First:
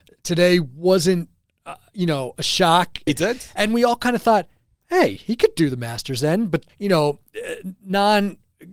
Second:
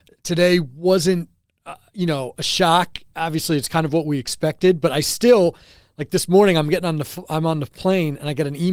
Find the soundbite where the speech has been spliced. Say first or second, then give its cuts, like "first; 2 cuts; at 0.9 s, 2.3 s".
first; 2 cuts; at 3.1 s, 6.7 s